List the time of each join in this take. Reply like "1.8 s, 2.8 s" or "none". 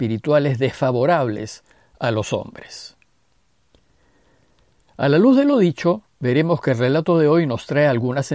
none